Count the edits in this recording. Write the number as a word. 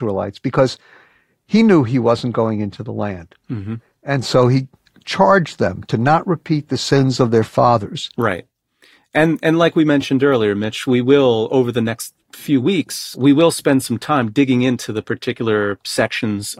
zero